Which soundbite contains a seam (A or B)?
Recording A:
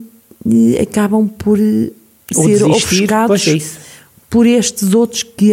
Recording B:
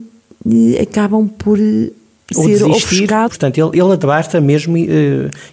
B